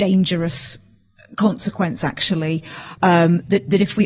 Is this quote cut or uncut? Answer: cut